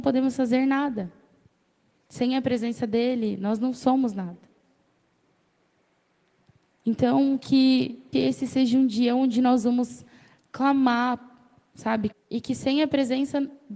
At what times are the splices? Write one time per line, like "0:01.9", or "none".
0:08.1
0:12.1